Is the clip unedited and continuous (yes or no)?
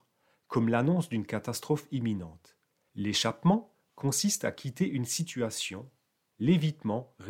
no